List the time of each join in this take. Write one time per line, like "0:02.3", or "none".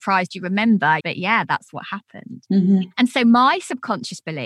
0:01.0